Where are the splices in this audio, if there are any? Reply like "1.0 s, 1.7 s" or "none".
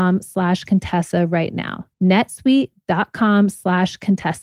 1.9 s